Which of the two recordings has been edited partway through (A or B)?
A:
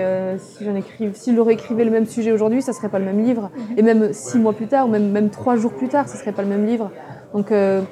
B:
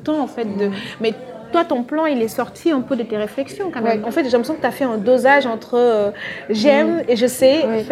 B